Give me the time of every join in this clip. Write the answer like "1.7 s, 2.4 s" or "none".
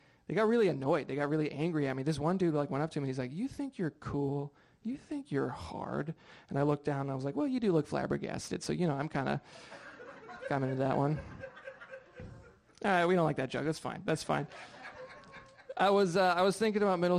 none